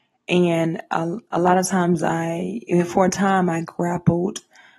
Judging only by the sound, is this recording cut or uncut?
uncut